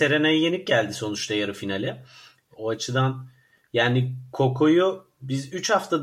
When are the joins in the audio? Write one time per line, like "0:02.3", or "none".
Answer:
0:02.5